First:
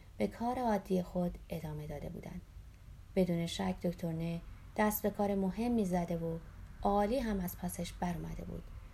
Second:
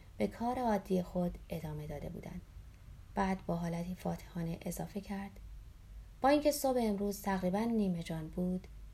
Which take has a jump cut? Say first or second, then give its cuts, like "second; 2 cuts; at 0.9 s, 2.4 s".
second; 1 cut; at 3.1 s